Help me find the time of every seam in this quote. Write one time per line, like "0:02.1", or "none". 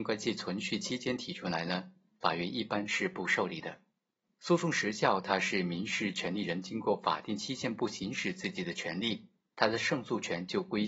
0:04.3
0:09.5